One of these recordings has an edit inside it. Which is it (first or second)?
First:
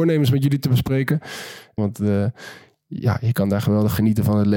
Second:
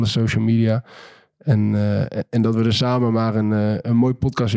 first